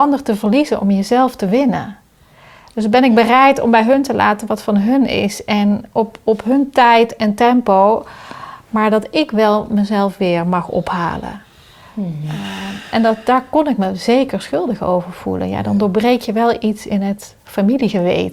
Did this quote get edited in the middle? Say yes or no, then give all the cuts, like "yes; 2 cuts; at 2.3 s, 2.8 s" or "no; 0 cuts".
no; 0 cuts